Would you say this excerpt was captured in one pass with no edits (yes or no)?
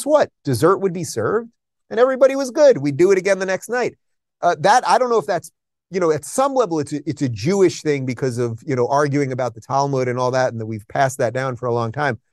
yes